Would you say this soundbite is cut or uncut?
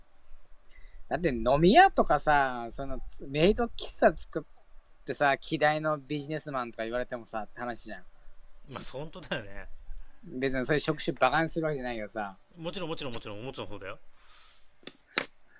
uncut